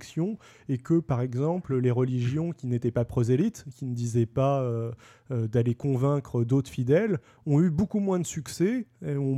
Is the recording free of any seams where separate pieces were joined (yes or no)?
yes